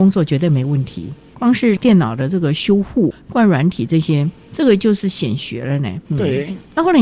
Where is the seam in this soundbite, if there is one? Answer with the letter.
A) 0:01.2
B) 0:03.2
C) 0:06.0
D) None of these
C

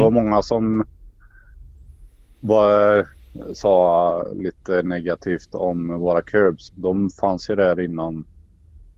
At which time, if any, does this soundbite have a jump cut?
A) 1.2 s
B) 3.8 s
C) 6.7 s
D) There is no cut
C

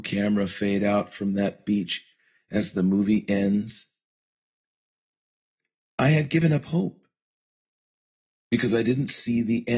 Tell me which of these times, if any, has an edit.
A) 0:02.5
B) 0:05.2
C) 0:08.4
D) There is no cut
C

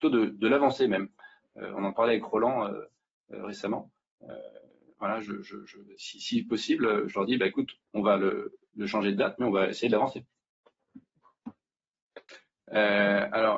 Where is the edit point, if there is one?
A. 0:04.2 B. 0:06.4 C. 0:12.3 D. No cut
C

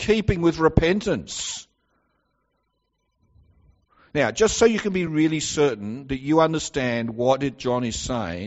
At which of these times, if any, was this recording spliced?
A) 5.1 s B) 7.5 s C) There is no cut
C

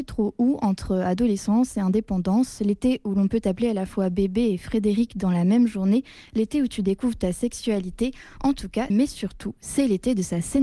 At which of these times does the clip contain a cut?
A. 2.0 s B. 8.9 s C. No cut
B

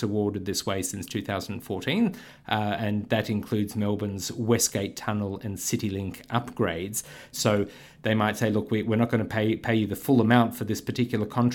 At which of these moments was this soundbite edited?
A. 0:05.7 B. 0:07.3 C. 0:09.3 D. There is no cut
B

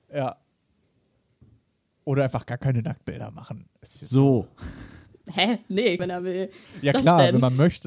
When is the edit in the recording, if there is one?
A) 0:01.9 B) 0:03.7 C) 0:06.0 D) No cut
C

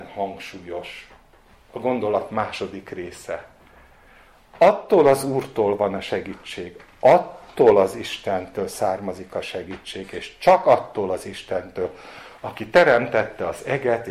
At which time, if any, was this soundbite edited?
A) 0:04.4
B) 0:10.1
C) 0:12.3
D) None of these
D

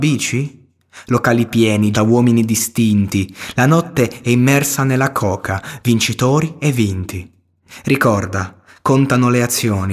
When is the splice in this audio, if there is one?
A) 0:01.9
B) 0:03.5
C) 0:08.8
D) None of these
A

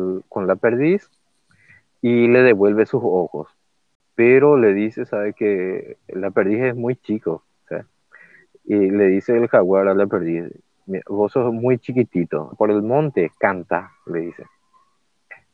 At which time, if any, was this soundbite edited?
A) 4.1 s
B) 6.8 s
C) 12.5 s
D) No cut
C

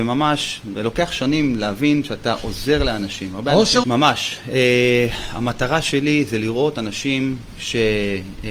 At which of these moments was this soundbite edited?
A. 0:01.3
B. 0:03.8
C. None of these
B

